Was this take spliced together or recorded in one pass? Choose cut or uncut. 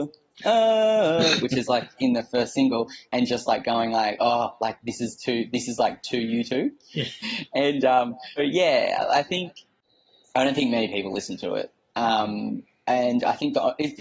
cut